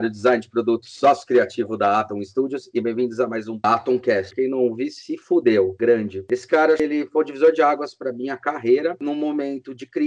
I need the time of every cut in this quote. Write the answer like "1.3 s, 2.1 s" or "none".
4.3 s